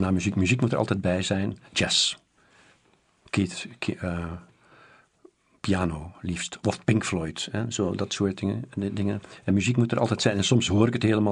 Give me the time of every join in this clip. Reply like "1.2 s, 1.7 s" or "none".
1.7 s